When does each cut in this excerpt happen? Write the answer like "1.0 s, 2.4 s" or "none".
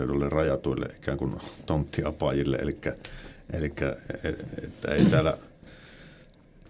none